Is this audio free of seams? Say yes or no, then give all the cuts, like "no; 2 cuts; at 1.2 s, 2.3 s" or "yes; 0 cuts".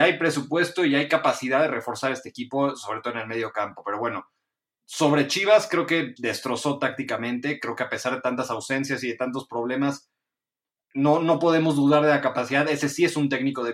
no; 1 cut; at 6.2 s